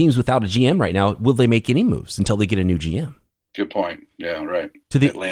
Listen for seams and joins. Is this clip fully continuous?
yes; 0 cuts

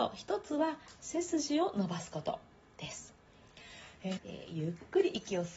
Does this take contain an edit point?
yes; 1 cut; at 4.2 s

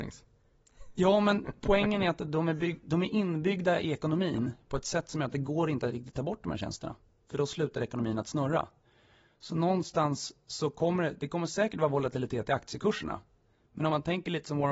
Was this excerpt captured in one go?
yes; 0 cuts

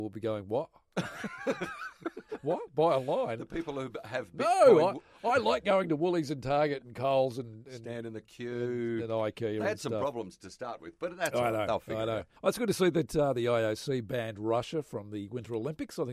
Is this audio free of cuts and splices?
no; 1 cut; at 12.4 s

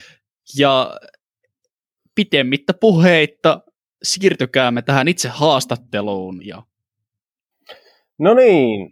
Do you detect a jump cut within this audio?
no; 0 cuts

